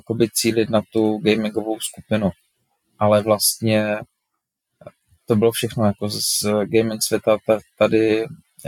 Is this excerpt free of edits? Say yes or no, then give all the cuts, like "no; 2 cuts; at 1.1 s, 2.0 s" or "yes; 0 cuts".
yes; 0 cuts